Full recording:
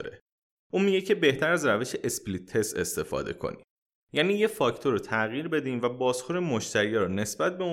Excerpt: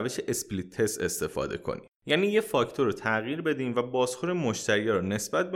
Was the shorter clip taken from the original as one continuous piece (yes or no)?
no